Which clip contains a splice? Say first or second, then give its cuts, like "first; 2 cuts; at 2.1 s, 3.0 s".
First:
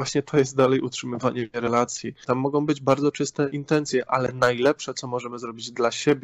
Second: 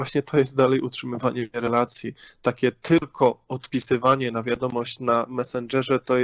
first; 1 cut; at 2.2 s